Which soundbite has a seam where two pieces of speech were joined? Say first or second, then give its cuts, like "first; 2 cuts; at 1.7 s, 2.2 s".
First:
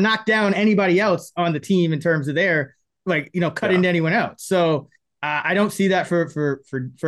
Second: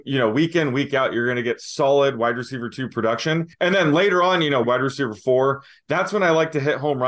second; 2 cuts; at 3.5 s, 4.6 s